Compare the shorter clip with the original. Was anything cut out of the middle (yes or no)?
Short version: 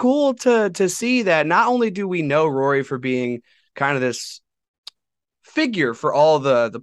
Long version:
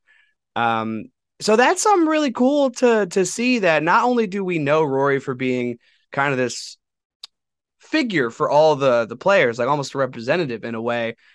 no